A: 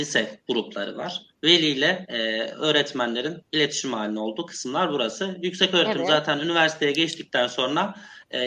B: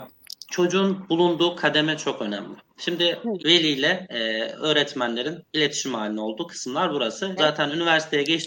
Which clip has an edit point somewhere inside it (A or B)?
B